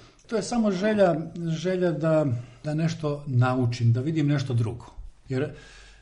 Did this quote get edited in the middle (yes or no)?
no